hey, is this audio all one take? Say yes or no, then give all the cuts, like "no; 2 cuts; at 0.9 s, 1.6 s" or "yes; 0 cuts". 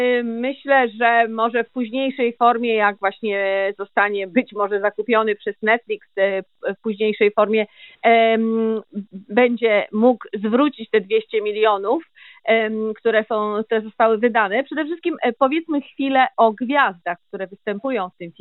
yes; 0 cuts